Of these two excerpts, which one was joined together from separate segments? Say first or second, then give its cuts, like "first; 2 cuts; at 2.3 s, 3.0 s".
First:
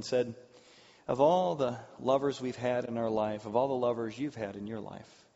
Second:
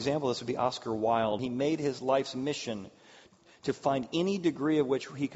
second; 1 cut; at 1.4 s